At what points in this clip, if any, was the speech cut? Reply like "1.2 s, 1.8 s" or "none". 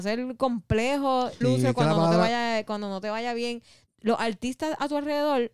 1.4 s, 3.9 s